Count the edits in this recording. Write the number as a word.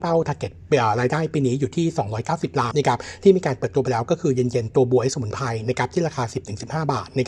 one